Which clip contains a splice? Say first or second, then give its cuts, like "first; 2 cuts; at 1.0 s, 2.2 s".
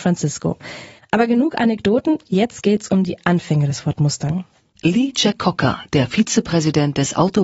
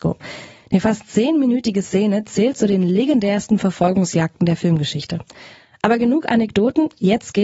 first; 1 cut; at 1.0 s